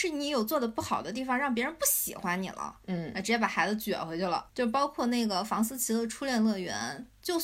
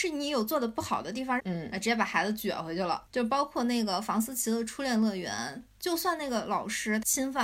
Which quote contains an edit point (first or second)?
second